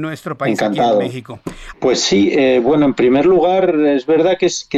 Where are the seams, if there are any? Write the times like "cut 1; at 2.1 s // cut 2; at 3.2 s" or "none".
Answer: cut 1; at 1.7 s